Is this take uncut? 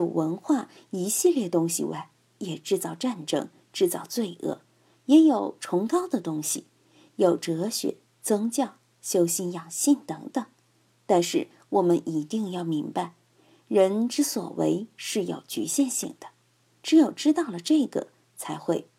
yes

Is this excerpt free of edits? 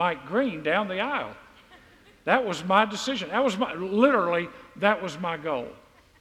yes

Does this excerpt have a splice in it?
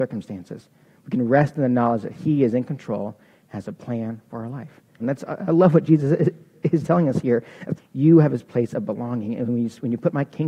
yes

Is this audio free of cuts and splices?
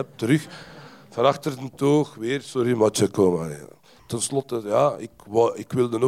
no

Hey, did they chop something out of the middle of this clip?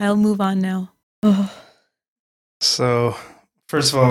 yes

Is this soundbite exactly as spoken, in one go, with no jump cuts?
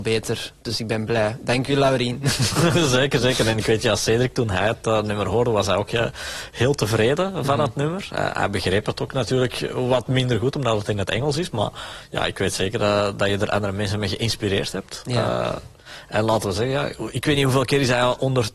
yes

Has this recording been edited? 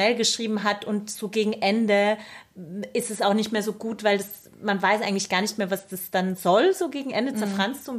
no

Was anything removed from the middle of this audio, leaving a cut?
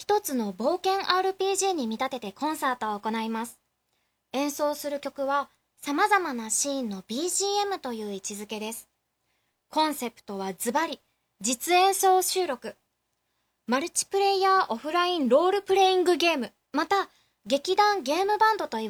yes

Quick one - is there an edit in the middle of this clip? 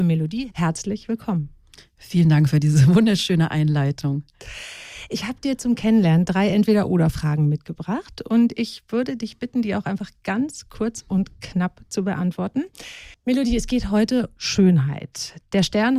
yes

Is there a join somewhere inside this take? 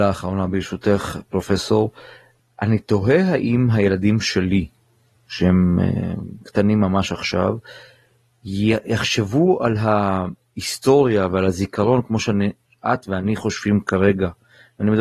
no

